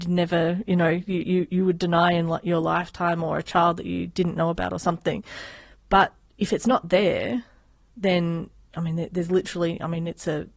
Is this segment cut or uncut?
uncut